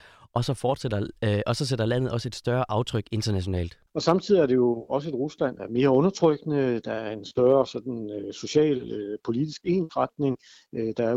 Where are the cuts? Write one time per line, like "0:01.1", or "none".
0:03.9
0:05.6

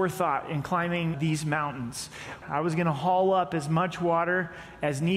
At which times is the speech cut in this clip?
0:01.1
0:02.4

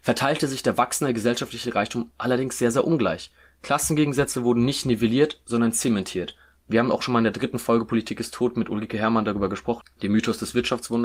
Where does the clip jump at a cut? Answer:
0:06.6
0:09.8

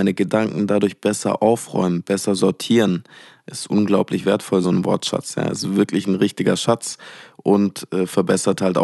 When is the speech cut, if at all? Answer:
0:04.6

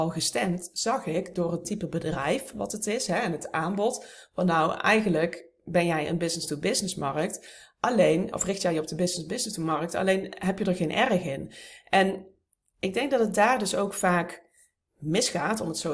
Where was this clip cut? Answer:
none

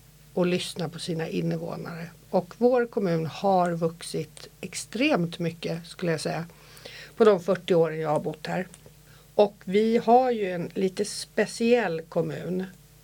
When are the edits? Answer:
none

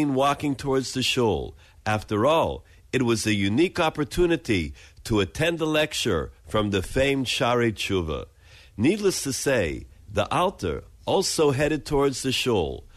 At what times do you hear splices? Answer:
none

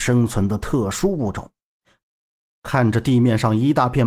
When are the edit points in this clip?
0:02.0

